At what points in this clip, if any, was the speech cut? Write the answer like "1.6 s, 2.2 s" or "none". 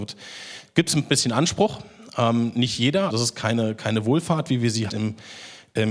3.1 s, 4.9 s